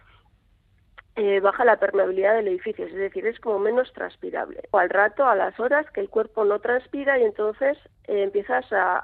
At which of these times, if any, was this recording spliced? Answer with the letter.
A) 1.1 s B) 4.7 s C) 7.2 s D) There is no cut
B